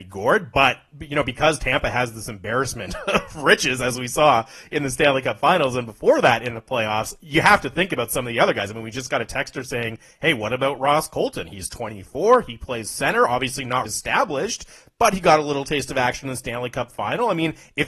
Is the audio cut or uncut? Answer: cut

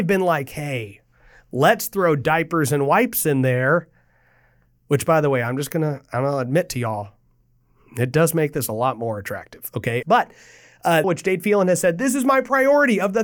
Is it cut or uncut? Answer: cut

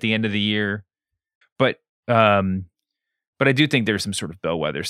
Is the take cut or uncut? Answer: cut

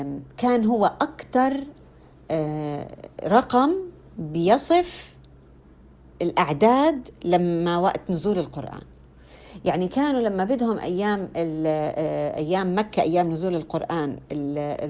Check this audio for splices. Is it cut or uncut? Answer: uncut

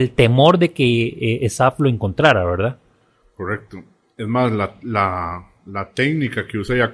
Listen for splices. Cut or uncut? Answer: uncut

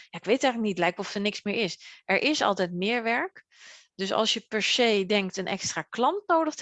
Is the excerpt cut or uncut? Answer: uncut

